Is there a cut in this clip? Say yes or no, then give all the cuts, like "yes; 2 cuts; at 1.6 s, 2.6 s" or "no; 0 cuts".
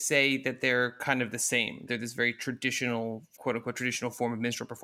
yes; 2 cuts; at 1.9 s, 3.4 s